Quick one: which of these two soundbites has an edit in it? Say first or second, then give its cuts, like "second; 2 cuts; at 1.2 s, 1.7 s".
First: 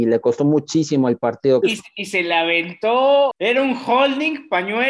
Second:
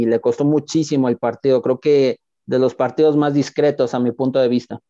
first; 2 cuts; at 1.6 s, 3.3 s